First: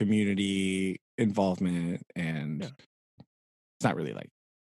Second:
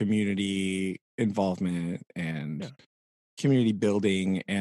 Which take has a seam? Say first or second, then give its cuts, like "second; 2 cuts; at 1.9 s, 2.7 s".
first; 1 cut; at 3.2 s